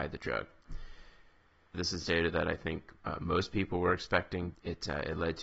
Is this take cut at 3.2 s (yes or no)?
no